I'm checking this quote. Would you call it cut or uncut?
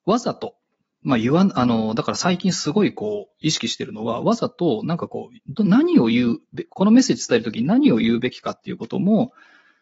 cut